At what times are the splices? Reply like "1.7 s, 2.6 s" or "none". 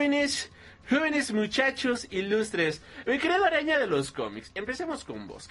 none